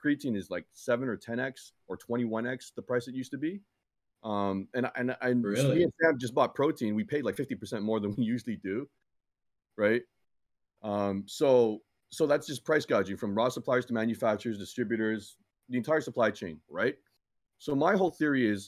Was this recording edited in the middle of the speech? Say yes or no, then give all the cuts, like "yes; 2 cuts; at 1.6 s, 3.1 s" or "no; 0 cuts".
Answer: yes; 1 cut; at 16.7 s